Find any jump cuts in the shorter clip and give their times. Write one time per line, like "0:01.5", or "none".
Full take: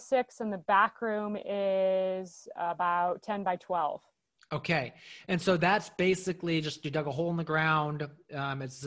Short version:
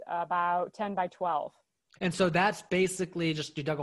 0:02.0